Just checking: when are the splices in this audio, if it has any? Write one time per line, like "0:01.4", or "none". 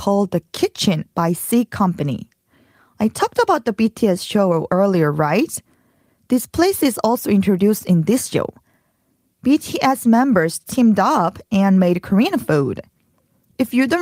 none